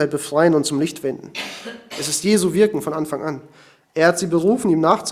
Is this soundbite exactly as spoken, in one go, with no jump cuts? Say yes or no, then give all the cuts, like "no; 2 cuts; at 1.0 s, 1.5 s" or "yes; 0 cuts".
yes; 0 cuts